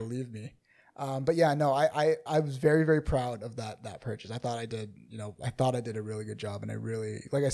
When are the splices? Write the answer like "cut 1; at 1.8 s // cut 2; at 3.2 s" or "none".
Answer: cut 1; at 2.3 s

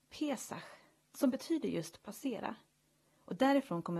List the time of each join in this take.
none

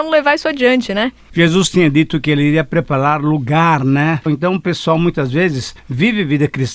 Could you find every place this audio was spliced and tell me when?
cut 1; at 4.3 s

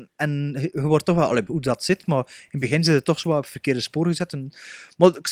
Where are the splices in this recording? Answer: cut 1; at 1.5 s

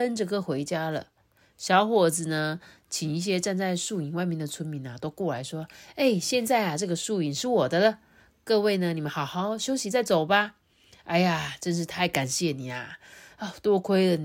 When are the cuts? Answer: none

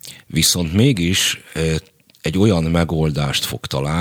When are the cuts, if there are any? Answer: none

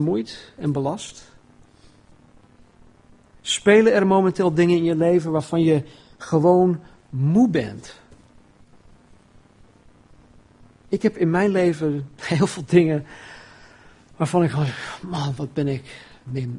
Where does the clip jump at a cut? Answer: none

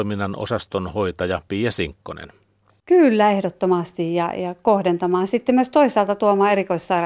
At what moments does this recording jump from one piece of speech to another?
none

